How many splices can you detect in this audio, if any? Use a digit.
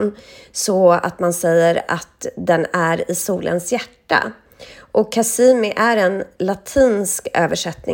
0